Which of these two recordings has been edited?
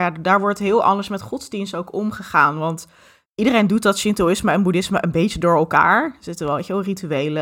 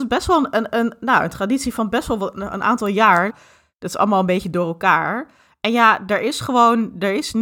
second; 1 cut; at 3.3 s

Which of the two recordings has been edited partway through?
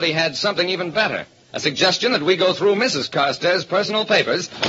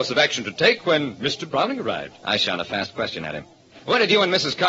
second; 1 cut; at 2.2 s

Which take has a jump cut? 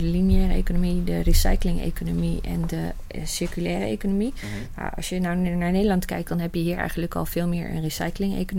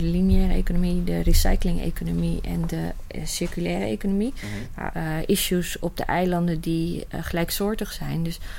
second; 1 cut; at 4.9 s

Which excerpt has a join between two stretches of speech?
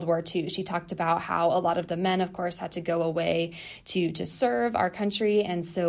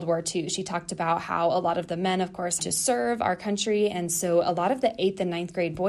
second; 1 cut; at 2.6 s

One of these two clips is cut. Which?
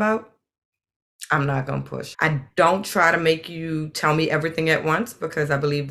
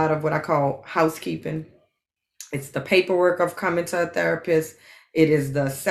first; 1 cut; at 2.1 s

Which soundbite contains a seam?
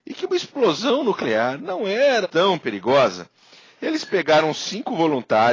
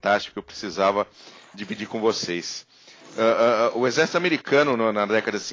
first; 1 cut; at 2.2 s

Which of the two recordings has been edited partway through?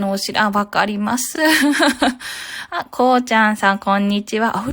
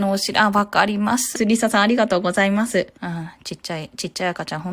second; 2 cuts; at 1.4 s, 3.0 s

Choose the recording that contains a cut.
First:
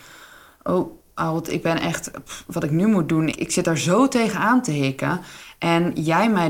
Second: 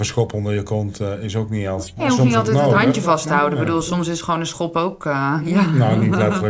first; 1 cut; at 3.3 s

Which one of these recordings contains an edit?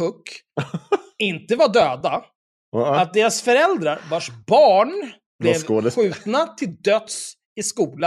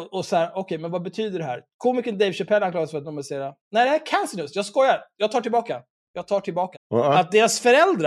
second; 1 cut; at 6.7 s

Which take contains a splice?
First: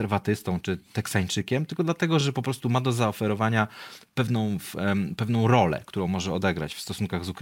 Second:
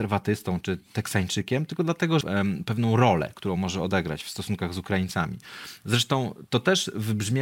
second; 1 cut; at 2.2 s

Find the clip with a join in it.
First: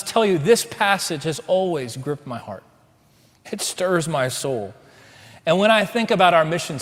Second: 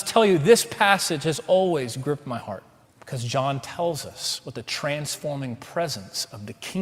second; 1 cut; at 2.9 s

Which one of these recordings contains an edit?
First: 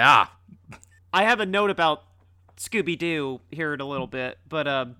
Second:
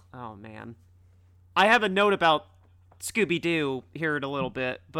first; 1 cut; at 1.0 s

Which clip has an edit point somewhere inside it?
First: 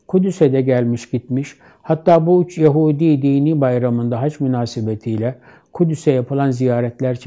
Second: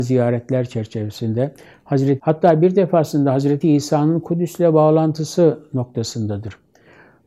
second; 2 cuts; at 2.2 s, 3.6 s

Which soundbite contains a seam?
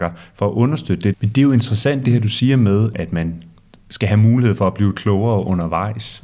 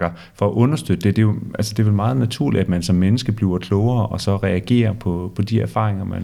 first; 2 cuts; at 1.1 s, 2.9 s

